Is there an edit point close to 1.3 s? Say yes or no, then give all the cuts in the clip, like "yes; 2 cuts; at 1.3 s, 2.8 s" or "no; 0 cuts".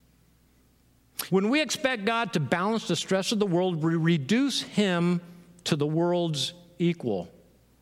yes; 1 cut; at 1.3 s